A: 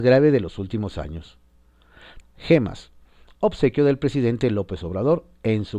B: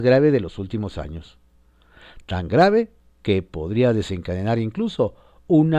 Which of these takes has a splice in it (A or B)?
A